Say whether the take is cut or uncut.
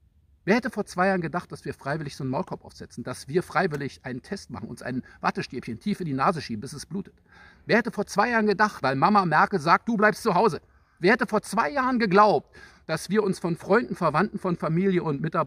cut